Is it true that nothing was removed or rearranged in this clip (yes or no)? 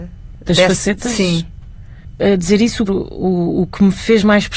no